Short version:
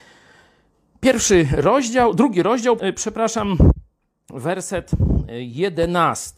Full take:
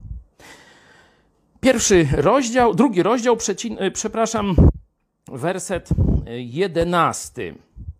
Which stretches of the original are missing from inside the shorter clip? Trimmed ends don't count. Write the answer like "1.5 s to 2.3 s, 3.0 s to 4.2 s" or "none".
3.4 s to 3.8 s